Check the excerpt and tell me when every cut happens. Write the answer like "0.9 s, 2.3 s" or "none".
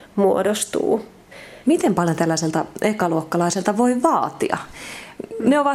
1.6 s